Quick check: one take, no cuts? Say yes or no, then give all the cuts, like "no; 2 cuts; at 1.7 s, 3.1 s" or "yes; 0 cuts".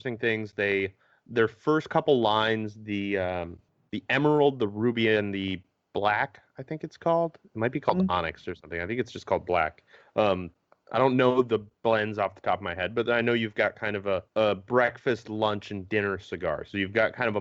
no; 1 cut; at 14.3 s